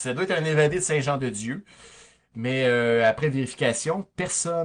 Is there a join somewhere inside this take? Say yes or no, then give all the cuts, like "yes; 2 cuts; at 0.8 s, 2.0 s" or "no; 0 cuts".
no; 0 cuts